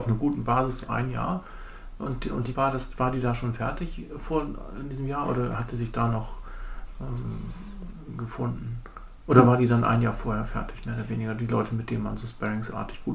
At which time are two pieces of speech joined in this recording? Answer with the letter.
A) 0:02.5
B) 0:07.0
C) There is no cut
A